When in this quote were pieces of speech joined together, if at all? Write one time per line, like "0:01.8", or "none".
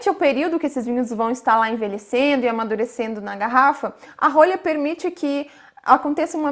none